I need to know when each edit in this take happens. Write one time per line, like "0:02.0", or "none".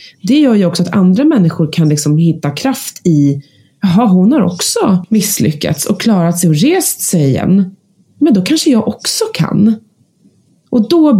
none